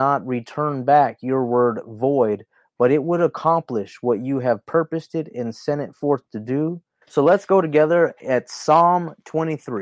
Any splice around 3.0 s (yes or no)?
no